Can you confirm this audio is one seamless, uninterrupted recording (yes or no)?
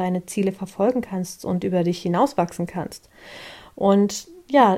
yes